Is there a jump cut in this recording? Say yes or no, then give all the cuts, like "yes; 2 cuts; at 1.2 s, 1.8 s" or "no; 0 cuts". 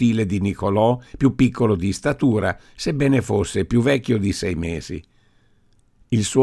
no; 0 cuts